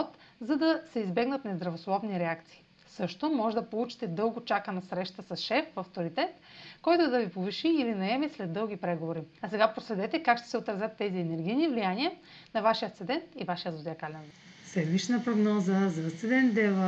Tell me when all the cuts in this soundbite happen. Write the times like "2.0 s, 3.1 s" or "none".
9.4 s